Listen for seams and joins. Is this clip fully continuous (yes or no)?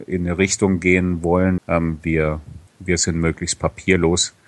no